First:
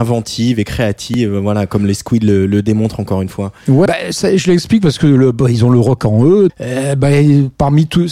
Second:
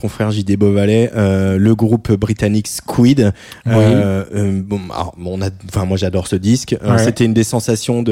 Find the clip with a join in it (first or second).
first